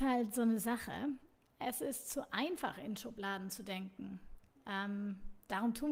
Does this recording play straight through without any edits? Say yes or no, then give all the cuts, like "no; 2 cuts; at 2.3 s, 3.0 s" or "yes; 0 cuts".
yes; 0 cuts